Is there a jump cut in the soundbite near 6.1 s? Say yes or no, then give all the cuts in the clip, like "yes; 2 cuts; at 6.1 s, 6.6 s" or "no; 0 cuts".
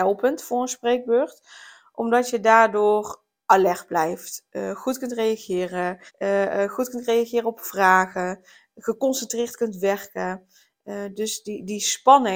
yes; 1 cut; at 6.1 s